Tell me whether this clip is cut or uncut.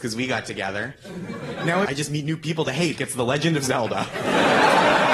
cut